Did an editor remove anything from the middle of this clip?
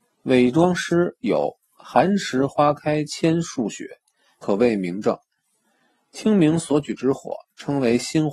yes; 1 cut; at 4.4 s

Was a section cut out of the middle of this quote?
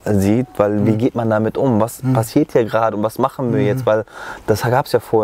no; 0 cuts

